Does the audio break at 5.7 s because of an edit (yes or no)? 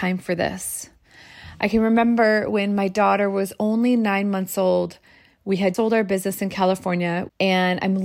yes